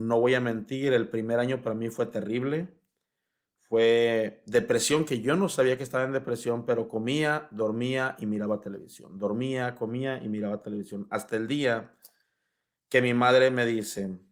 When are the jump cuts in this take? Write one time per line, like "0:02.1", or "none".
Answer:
none